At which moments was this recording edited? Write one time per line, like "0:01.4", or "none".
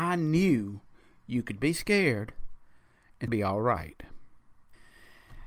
0:03.3